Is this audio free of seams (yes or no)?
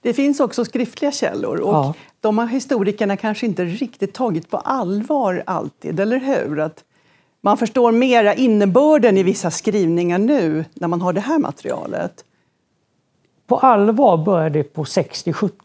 yes